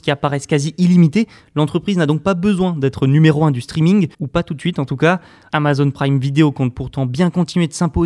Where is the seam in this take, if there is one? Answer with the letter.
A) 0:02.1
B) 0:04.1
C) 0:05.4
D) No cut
B